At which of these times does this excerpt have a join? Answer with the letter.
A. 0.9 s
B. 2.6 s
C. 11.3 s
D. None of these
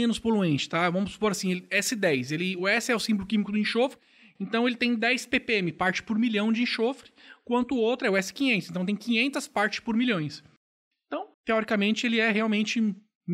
C